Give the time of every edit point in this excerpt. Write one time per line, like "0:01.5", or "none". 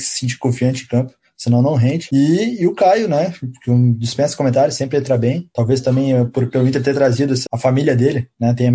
0:05.5
0:07.5